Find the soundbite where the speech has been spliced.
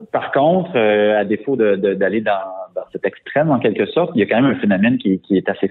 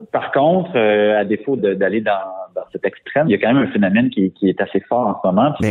second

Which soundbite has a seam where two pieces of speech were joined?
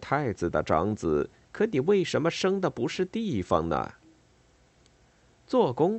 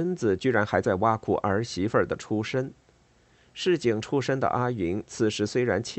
first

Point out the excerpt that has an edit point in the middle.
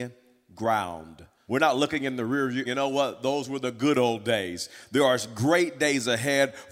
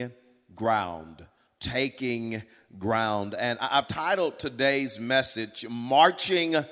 first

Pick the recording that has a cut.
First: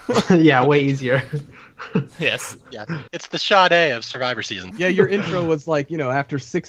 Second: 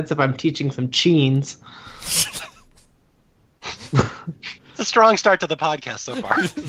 first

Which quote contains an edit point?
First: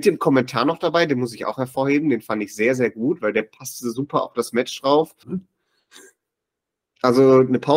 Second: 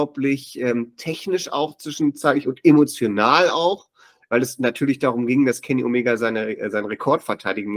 first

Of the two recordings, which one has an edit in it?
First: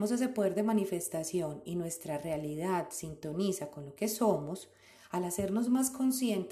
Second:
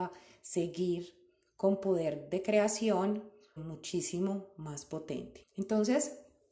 second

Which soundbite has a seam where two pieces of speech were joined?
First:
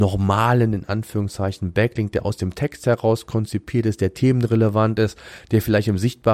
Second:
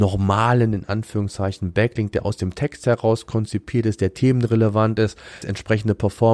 second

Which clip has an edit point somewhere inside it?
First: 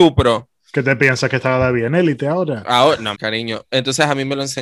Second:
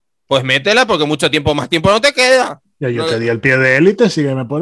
first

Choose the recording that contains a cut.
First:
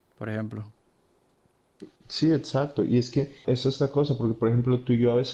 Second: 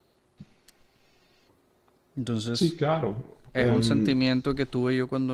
first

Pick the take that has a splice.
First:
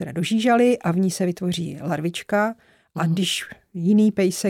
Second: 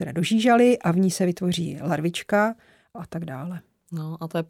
second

